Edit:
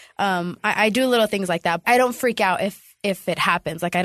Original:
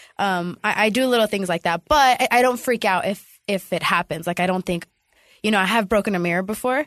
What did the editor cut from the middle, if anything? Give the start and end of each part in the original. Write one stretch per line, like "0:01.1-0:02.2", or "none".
0:01.8-0:02.3